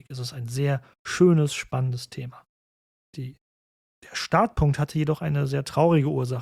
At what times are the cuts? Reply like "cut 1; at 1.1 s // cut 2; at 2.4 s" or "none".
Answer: cut 1; at 2.9 s